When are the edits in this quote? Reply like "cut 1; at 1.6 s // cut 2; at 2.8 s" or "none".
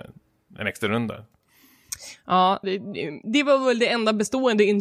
cut 1; at 2.6 s